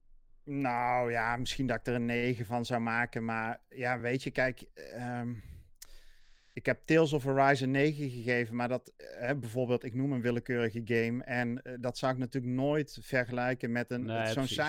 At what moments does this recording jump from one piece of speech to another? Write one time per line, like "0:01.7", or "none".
none